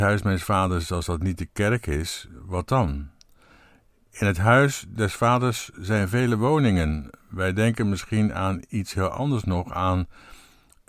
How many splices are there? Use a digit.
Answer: 0